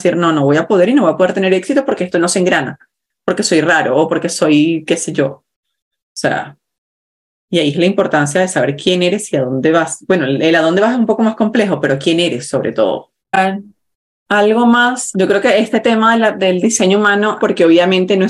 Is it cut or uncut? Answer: cut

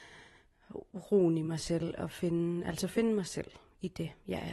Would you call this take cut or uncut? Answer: uncut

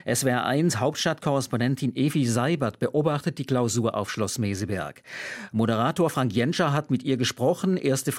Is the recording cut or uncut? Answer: uncut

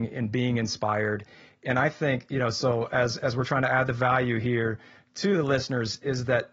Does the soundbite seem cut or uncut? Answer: uncut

